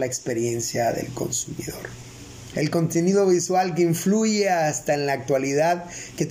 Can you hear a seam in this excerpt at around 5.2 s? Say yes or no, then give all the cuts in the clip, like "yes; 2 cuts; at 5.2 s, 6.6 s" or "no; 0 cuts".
no; 1 cut; at 2.5 s